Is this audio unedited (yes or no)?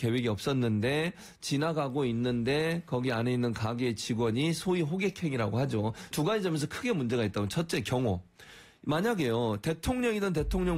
no